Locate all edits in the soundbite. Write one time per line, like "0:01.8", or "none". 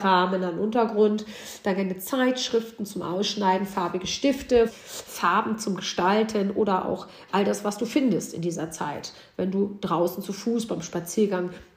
0:04.7